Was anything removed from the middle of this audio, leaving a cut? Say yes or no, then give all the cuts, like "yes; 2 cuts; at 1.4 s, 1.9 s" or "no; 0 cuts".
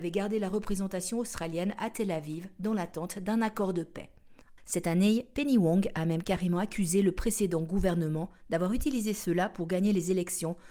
yes; 1 cut; at 4.6 s